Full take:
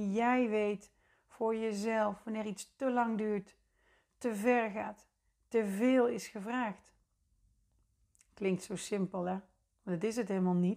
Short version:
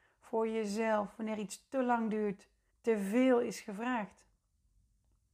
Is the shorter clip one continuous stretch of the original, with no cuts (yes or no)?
no